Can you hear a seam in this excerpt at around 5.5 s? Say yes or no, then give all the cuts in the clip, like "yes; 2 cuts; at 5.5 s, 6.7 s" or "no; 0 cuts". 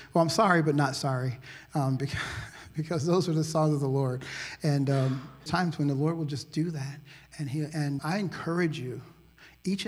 yes; 2 cuts; at 5.5 s, 8.0 s